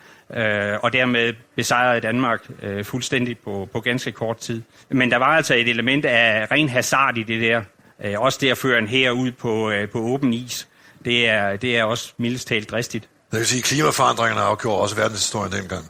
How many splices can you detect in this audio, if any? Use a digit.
0